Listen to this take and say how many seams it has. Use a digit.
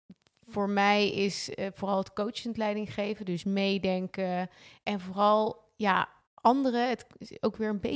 0